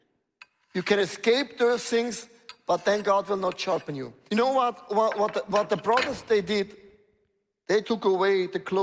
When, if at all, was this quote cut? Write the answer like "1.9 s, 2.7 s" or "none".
4.3 s, 7.8 s